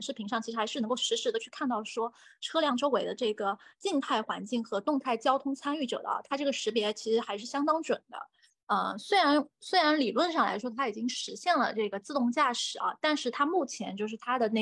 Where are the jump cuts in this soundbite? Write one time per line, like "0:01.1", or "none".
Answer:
0:08.5